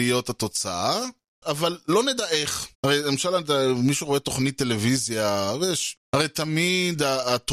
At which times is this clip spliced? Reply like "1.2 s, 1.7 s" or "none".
2.7 s, 6.0 s